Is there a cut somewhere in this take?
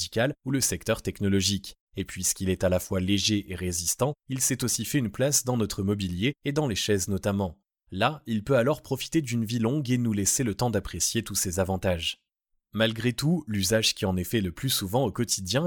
no; 0 cuts

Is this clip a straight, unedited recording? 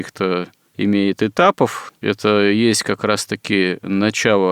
no; 1 cut; at 1.9 s

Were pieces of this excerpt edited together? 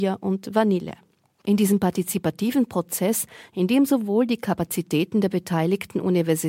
yes; 1 cut; at 1.4 s

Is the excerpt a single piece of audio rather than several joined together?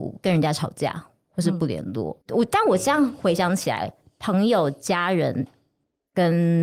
no; 1 cut; at 2.2 s

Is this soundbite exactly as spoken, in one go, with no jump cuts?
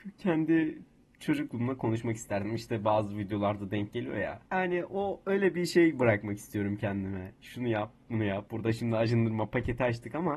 no; 2 cuts; at 4.5 s, 8.5 s

